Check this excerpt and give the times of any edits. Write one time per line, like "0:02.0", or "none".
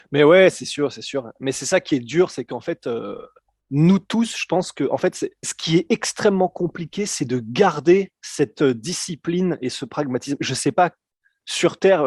0:05.4